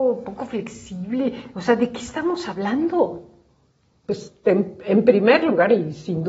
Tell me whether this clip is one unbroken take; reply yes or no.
yes